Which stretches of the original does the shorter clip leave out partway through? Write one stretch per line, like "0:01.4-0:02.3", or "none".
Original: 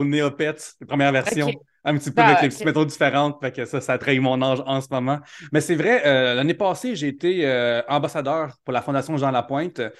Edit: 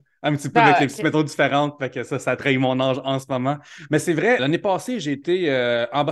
0:06.0-0:06.3